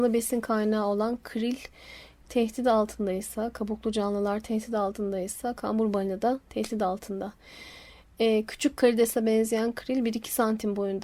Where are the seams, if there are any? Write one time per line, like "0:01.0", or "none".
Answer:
none